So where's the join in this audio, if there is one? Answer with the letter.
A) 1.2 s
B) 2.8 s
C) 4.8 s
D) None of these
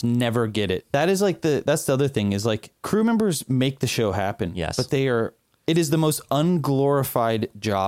B